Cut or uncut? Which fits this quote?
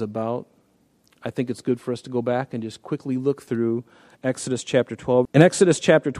cut